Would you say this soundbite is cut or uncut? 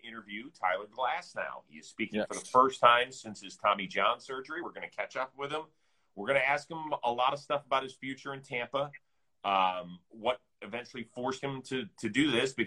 uncut